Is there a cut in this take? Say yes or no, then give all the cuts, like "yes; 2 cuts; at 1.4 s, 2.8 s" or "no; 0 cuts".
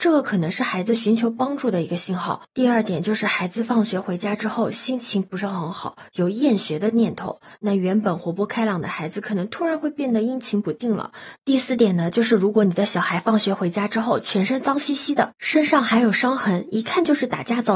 yes; 2 cuts; at 2.5 s, 11.4 s